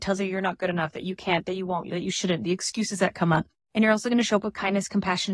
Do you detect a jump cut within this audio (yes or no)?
no